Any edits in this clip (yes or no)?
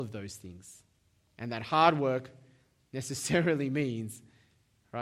no